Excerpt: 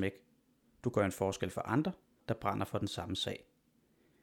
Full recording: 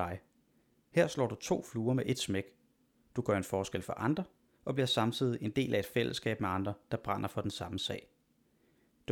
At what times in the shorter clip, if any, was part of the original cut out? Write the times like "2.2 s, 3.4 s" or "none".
2.2 s